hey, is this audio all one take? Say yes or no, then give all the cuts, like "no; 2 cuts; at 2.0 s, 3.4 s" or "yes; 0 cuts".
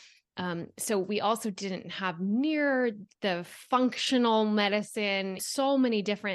no; 1 cut; at 5.4 s